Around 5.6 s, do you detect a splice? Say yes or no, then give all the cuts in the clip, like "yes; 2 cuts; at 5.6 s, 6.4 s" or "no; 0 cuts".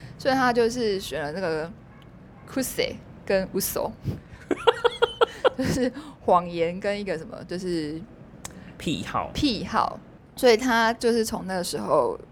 no; 1 cut; at 10.3 s